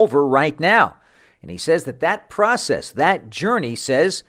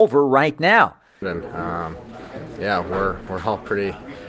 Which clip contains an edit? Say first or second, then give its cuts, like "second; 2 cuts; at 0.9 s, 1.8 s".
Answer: second; 1 cut; at 1.2 s